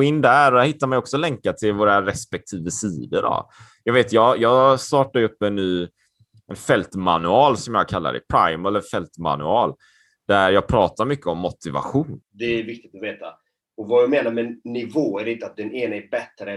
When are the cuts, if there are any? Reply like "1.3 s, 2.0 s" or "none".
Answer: 12.2 s